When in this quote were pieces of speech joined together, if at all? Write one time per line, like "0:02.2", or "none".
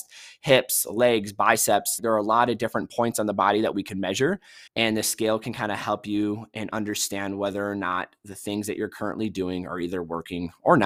0:02.0
0:04.7